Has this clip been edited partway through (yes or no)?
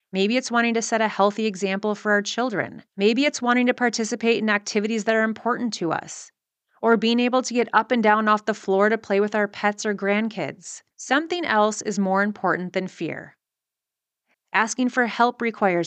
yes